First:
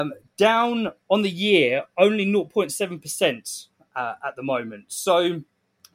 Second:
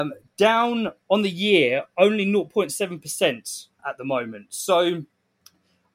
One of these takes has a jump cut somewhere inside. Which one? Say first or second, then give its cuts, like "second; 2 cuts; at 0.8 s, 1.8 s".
second; 1 cut; at 3.8 s